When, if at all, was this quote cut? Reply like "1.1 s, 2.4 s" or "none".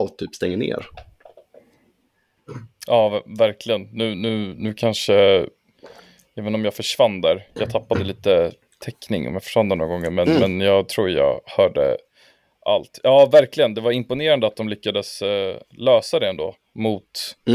none